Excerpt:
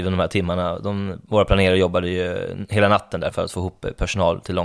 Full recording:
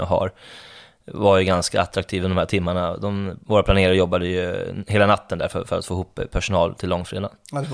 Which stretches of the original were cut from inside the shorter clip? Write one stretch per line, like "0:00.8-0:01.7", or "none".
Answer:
0:05.5-0:05.6